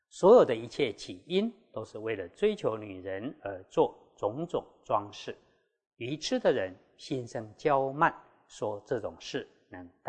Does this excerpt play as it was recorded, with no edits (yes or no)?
yes